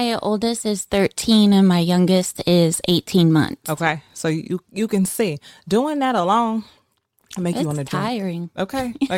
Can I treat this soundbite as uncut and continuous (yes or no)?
yes